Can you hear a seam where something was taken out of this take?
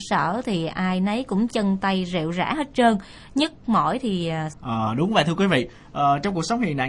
yes; 1 cut; at 4.5 s

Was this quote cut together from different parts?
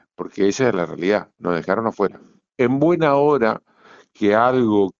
yes; 1 cut; at 2.5 s

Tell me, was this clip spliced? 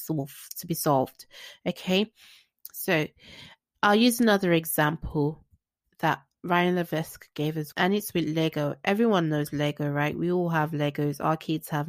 yes; 1 cut; at 7.7 s

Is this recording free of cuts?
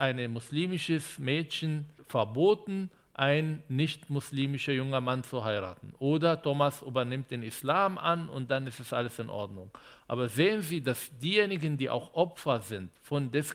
yes; 0 cuts

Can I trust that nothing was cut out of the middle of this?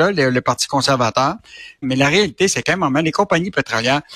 no; 1 cut; at 1.8 s

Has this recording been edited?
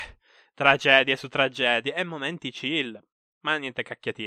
no; 0 cuts

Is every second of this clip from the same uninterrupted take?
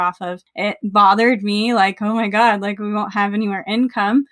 yes; 0 cuts

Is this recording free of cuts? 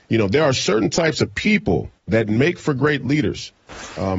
no; 1 cut; at 2.0 s

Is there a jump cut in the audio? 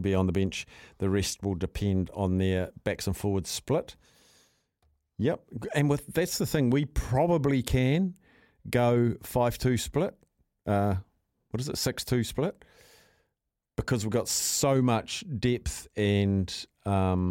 no; 0 cuts

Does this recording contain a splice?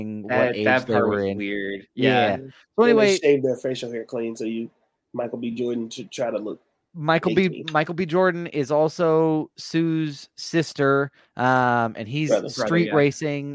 no; 0 cuts

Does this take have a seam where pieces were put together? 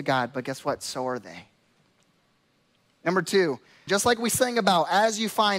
yes; 1 cut; at 3.9 s

